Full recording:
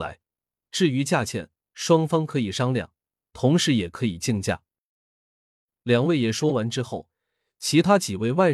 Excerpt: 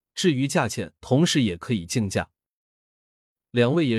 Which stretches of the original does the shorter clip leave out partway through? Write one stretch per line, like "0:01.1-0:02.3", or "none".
0:01.5-0:03.3